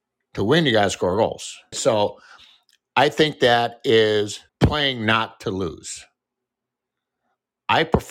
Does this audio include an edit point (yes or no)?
yes